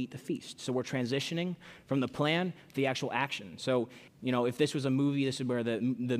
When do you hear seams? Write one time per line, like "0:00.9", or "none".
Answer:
0:04.1